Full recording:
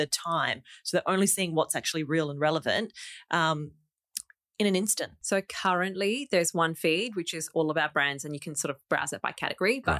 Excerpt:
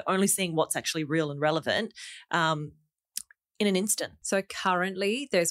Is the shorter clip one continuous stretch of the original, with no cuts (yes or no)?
yes